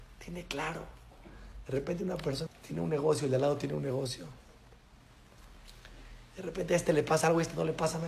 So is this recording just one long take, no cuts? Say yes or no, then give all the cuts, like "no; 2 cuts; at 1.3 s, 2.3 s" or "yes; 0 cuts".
no; 1 cut; at 2.5 s